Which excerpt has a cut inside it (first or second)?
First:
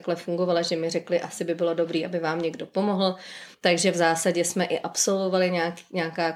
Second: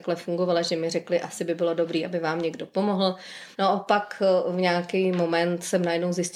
second